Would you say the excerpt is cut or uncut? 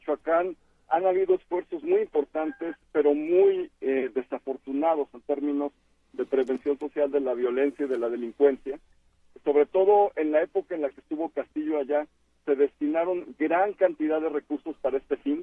uncut